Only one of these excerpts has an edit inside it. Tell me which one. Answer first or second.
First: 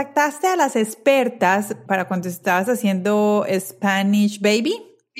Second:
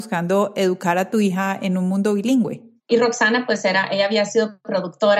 second